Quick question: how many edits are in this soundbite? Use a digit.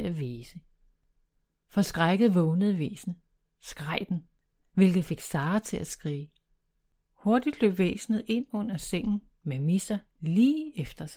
1